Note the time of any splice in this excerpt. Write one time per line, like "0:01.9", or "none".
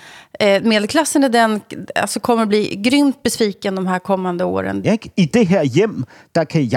0:04.8

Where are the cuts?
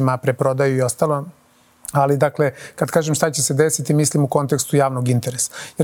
none

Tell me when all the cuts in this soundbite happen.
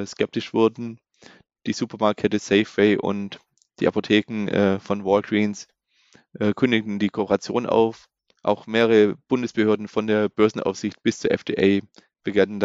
none

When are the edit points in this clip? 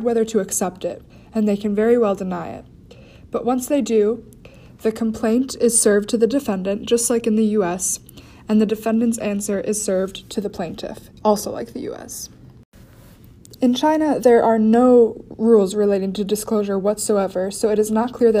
0:11.2
0:13.6

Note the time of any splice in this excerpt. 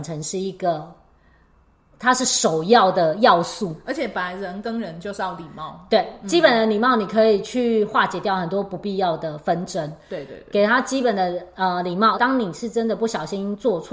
0:01.9
0:12.1

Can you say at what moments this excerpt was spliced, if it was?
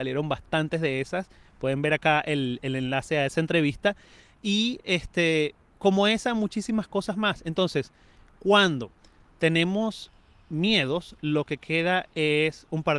none

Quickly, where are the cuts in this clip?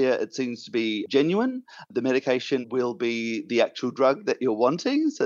0:02.6

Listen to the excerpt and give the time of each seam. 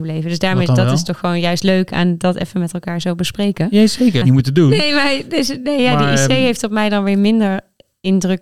0:04.2

